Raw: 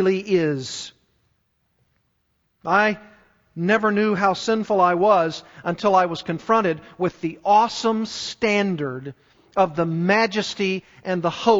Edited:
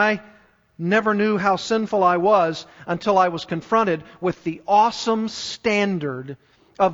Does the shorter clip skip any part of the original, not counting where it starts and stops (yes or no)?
no